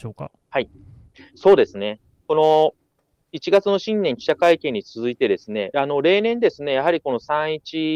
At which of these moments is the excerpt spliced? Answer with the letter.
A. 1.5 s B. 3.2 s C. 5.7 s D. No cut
C